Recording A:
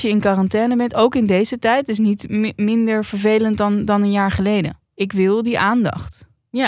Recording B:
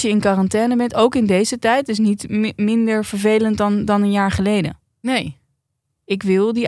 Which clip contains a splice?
A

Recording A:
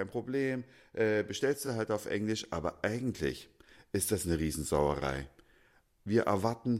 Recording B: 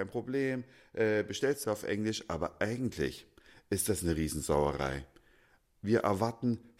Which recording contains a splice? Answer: B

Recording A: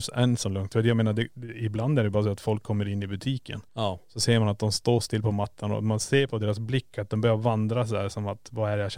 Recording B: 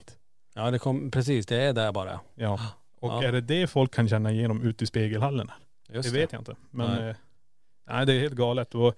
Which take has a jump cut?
A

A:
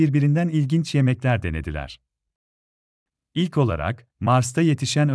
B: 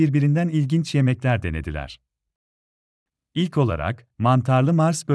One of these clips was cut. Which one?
B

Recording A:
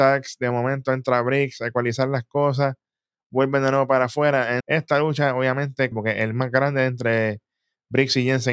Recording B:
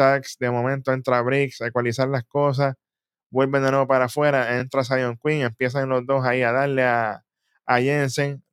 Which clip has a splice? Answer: A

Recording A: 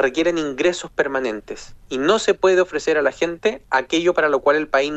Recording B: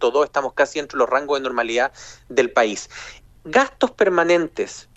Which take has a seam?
B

